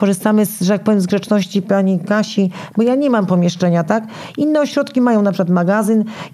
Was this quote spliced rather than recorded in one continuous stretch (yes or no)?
yes